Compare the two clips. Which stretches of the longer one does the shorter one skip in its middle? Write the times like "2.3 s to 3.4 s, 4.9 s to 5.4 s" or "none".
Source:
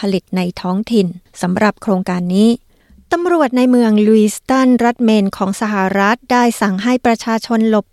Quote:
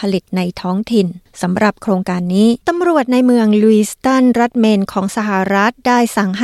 2.6 s to 3.1 s